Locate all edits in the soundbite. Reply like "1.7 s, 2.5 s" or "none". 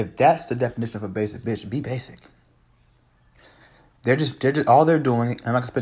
none